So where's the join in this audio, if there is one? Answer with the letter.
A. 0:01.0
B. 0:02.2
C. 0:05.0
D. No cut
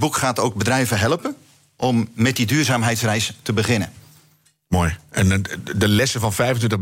B